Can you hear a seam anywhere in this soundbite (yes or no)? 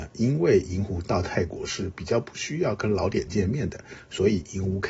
no